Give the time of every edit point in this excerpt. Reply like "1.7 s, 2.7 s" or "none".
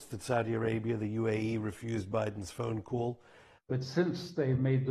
3.6 s